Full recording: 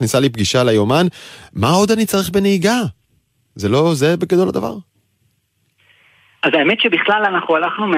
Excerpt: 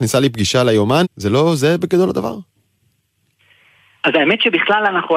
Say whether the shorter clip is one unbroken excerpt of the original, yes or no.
no